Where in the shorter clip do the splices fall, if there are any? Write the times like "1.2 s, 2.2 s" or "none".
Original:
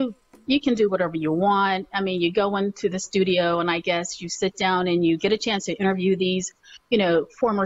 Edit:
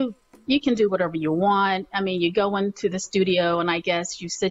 none